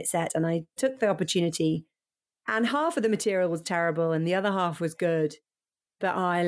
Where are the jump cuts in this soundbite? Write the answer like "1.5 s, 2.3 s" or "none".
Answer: none